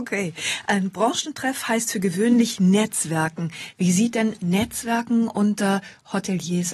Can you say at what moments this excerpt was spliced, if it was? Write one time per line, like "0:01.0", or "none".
none